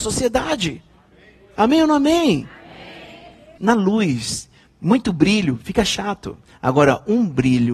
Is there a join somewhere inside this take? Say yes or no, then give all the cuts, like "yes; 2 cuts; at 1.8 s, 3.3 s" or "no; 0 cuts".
yes; 1 cut; at 3.6 s